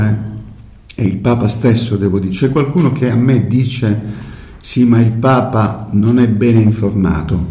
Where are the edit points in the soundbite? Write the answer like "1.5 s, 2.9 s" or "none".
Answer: none